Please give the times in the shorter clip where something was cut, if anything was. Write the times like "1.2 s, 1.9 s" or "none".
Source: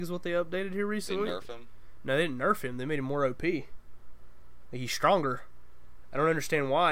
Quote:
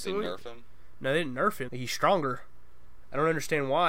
1.7 s